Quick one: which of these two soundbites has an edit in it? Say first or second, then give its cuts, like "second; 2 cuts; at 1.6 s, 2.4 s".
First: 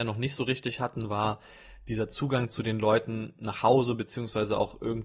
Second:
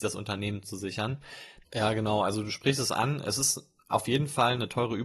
second; 1 cut; at 1.6 s